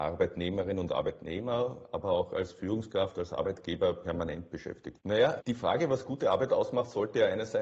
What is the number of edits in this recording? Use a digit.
1